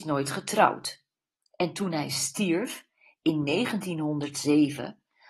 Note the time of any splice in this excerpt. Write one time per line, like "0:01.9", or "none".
none